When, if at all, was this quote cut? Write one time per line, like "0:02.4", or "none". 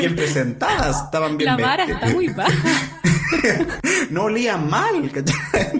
none